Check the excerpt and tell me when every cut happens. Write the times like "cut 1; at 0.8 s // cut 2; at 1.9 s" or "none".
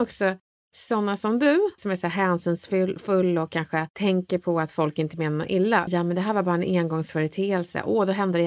cut 1; at 1.8 s // cut 2; at 5.9 s